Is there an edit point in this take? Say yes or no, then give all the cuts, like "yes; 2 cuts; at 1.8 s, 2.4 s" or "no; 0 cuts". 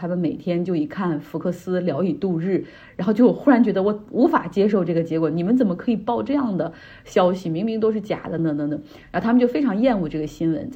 yes; 1 cut; at 8.4 s